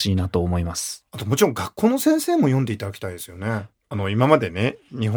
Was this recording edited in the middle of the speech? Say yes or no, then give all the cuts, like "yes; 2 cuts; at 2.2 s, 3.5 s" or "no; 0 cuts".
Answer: yes; 1 cut; at 3.7 s